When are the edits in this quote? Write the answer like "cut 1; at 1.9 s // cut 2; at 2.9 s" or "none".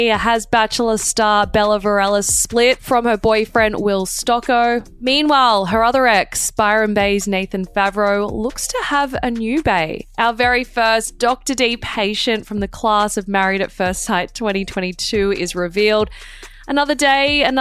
none

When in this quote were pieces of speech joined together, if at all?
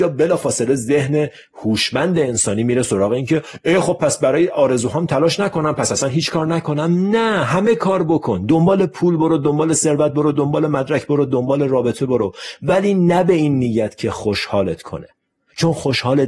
none

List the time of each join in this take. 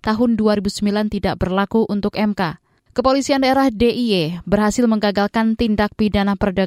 cut 1; at 2.8 s

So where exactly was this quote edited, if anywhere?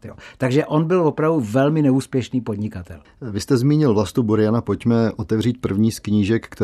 cut 1; at 3.0 s

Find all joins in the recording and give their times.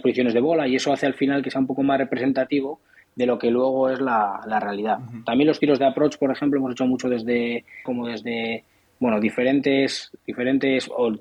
cut 1; at 7.9 s

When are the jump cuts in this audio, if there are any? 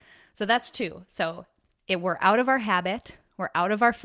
none

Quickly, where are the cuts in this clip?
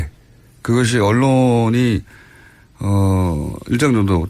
none

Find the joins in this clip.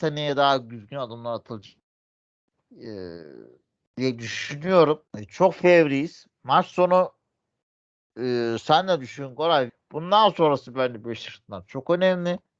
cut 1; at 5.1 s // cut 2; at 9.7 s

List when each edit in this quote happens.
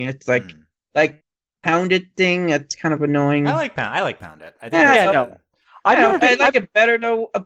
none

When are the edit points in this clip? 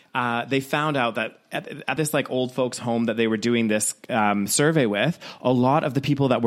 none

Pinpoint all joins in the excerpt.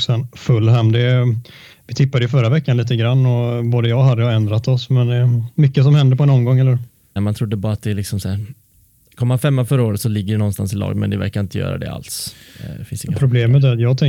cut 1; at 7.2 s

